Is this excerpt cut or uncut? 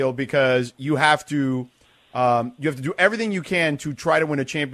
uncut